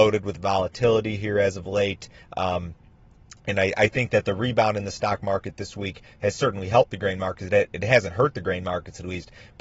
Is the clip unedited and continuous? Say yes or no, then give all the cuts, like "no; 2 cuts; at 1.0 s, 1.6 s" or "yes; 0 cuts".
yes; 0 cuts